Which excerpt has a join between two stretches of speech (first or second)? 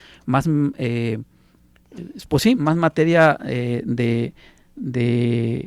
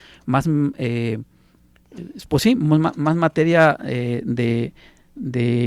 first